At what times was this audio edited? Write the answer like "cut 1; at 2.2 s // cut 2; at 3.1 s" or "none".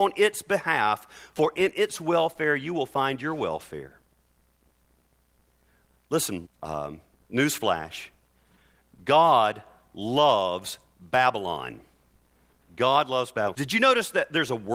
cut 1; at 6.5 s // cut 2; at 13.5 s